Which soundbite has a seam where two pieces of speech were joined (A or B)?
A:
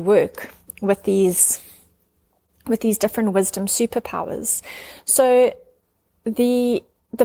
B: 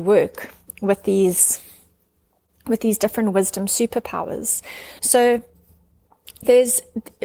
B